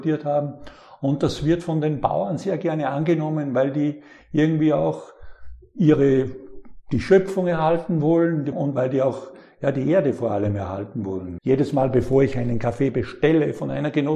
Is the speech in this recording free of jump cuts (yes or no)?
no